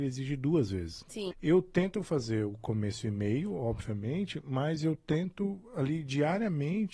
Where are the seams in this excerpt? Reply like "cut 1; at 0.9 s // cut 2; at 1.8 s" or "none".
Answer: cut 1; at 1.3 s

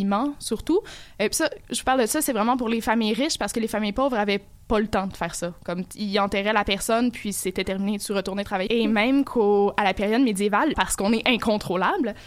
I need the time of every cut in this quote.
cut 1; at 8.7 s // cut 2; at 10.7 s

